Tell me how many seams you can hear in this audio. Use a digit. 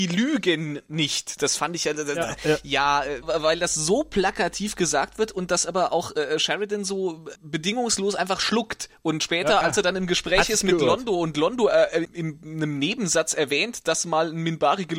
3